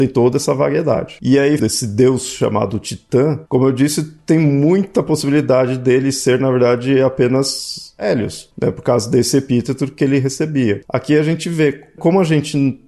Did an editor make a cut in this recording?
yes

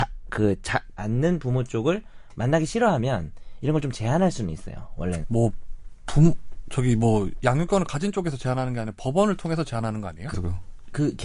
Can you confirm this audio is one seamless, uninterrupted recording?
no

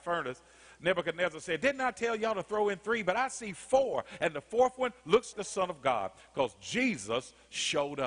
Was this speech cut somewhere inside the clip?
yes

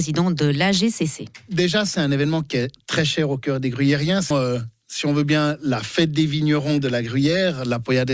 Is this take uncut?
no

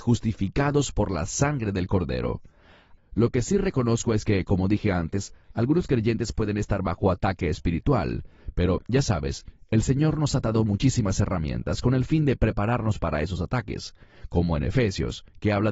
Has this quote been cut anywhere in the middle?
yes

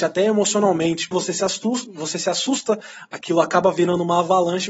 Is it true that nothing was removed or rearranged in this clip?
no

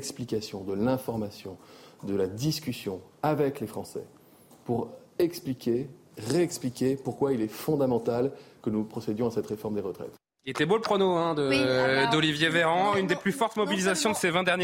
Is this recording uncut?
yes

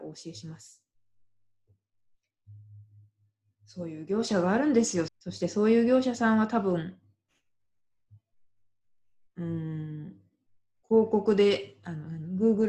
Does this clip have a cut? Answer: yes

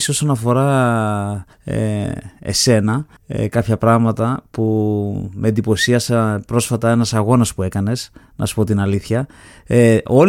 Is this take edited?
yes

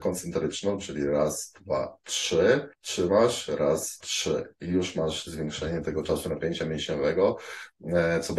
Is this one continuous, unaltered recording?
no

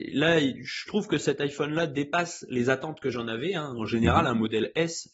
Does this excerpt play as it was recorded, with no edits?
yes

